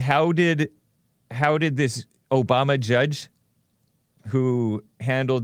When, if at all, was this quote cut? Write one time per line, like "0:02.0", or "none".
none